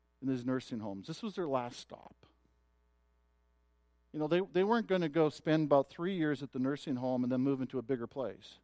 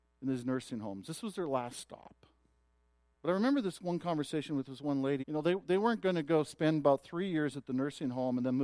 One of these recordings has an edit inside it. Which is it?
second; 2 cuts; at 3.1 s, 5.2 s

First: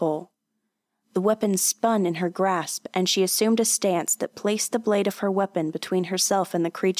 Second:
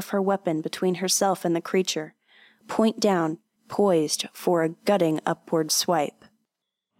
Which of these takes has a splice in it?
second; 1 cut; at 3.6 s

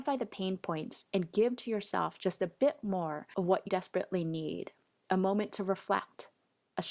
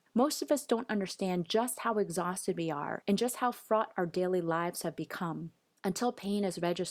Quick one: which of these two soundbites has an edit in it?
first; 1 cut; at 3.7 s

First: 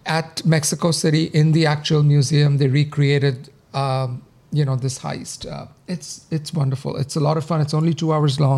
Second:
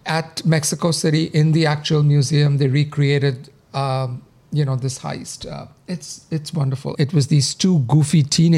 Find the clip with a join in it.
second; 1 cut; at 6.9 s

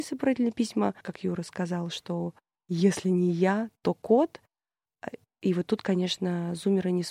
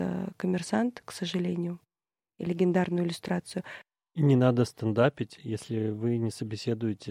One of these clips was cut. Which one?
first; 1 cut; at 1.0 s

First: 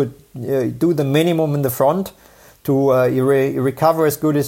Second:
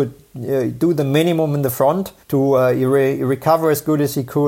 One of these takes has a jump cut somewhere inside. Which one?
second; 1 cut; at 2.2 s

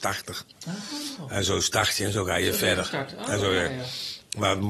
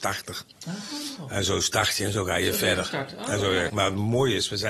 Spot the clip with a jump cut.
second; 1 cut; at 3.7 s

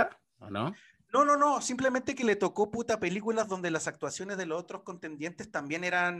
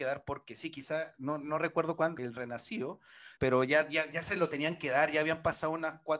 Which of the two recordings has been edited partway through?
second; 2 cuts; at 2.2 s, 3.4 s

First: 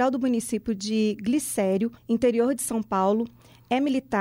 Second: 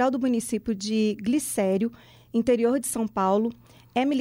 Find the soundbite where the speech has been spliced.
first; 1 cut; at 2.0 s

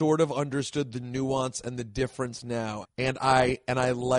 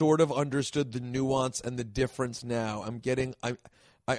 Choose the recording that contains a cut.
first; 1 cut; at 2.8 s

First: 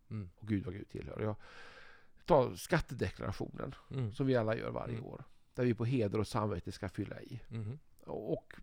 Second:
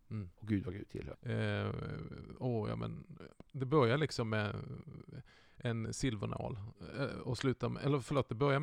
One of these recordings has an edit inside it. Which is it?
second; 1 cut; at 1.1 s

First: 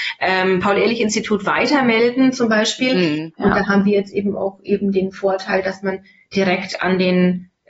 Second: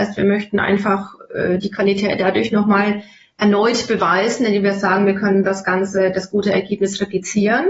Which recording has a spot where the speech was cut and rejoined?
first; 1 cut; at 3.3 s

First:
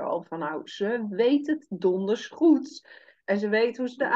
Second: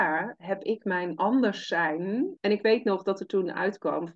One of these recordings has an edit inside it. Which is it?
second; 1 cut; at 2.4 s

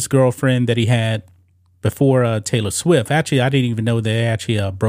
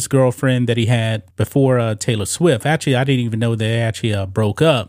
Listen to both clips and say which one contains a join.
second; 1 cut; at 1.3 s

